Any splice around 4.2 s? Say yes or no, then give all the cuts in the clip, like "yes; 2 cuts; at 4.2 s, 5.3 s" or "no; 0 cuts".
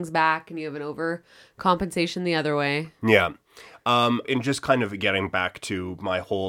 yes; 1 cut; at 4.2 s